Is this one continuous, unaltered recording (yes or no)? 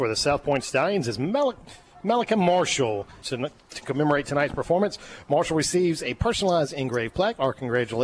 no